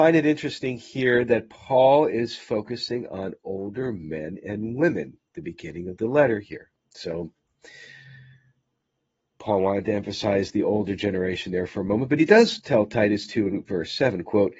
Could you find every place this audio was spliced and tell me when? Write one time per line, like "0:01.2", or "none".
0:06.8